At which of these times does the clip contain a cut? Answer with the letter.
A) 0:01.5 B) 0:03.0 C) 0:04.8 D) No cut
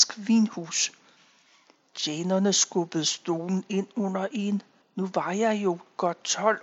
D